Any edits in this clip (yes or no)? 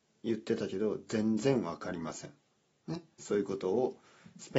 yes